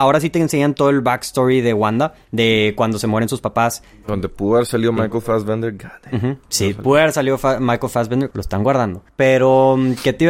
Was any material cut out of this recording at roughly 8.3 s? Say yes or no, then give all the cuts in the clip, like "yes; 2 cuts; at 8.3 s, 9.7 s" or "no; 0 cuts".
yes; 1 cut; at 8.3 s